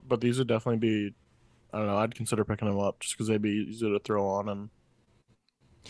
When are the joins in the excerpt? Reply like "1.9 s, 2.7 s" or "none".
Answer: none